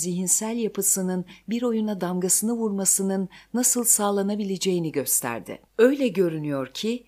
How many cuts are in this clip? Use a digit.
1